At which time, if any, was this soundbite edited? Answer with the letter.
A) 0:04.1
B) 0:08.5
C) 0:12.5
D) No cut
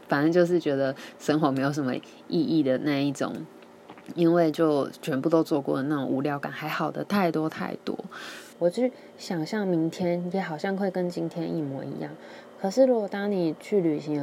B